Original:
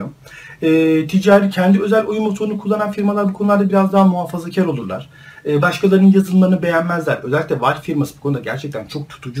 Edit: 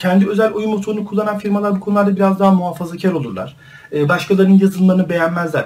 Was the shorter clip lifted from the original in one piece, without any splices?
yes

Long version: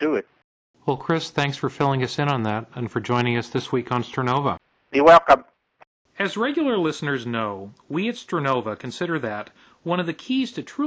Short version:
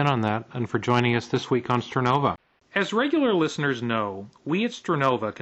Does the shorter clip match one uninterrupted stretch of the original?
no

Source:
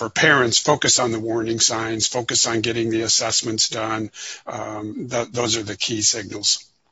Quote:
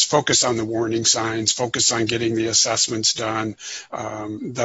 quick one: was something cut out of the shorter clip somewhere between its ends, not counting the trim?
no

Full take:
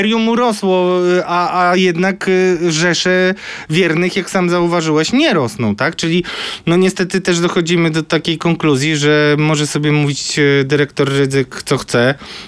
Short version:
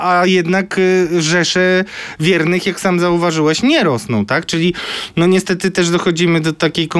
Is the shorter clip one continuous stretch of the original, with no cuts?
yes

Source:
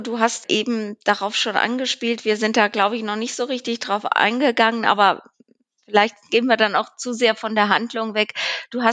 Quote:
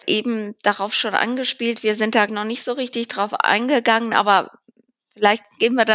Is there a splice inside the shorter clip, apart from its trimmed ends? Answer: yes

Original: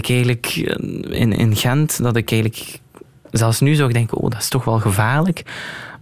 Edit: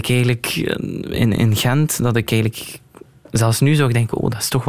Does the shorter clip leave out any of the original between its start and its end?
no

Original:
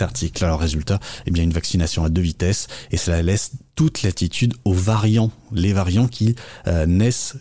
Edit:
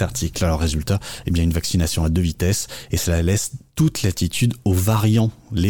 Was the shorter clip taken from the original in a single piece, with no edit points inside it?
yes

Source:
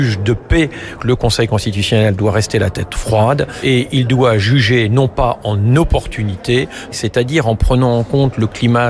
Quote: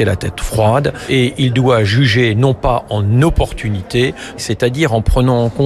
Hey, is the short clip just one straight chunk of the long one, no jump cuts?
yes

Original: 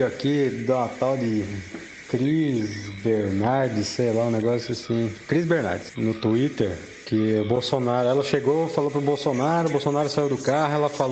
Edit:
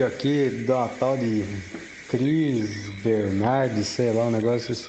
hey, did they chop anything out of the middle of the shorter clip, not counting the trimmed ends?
no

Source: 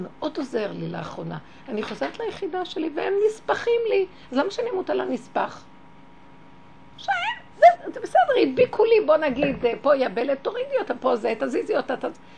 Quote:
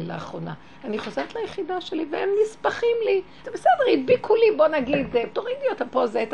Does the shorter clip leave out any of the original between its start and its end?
yes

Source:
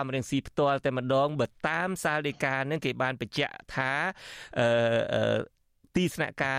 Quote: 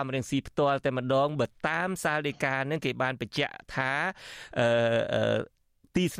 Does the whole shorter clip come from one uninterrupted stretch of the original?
yes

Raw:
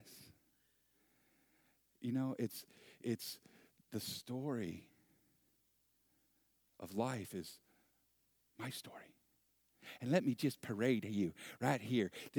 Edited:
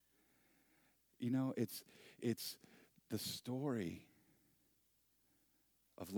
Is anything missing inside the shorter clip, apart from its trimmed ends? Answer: no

